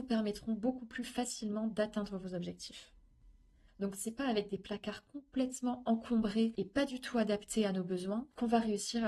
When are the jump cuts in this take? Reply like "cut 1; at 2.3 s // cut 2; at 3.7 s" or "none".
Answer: cut 1; at 3.7 s